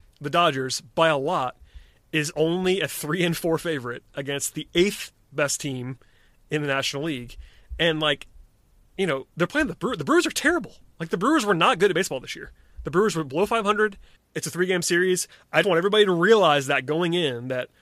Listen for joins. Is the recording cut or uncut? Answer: cut